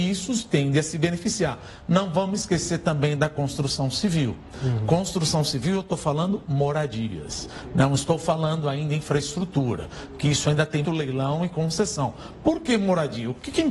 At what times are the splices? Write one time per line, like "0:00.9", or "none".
0:10.8